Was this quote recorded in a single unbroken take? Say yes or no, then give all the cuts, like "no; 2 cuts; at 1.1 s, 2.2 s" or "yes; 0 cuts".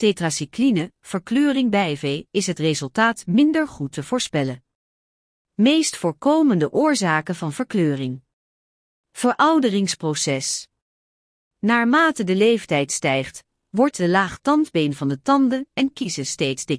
yes; 0 cuts